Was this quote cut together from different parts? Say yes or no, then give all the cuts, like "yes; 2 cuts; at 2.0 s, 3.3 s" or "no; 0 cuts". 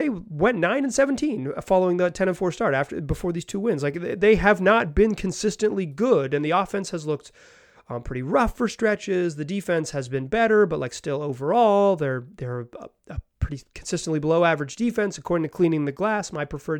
no; 0 cuts